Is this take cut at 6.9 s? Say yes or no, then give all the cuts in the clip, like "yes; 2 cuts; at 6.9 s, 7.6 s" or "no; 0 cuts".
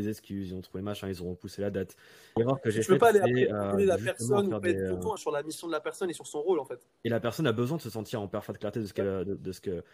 no; 2 cuts; at 2.4 s, 5.2 s